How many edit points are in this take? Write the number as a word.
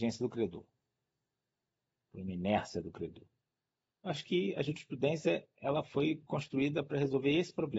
zero